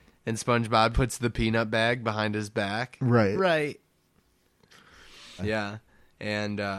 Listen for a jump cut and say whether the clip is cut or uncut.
cut